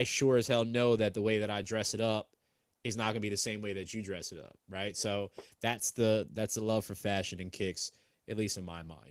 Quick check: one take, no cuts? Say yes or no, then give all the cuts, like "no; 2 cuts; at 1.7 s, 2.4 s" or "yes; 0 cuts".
yes; 0 cuts